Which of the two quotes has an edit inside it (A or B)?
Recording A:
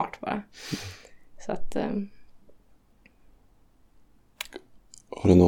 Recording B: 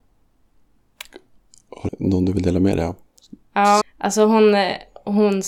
B